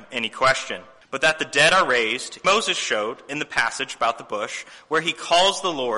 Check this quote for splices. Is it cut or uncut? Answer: cut